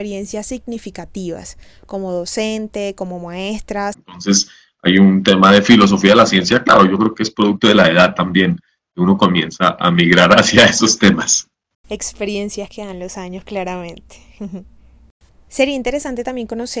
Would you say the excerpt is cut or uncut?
cut